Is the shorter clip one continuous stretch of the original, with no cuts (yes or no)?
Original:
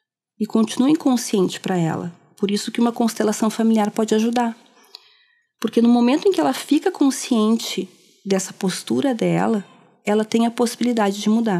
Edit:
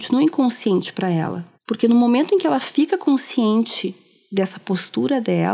no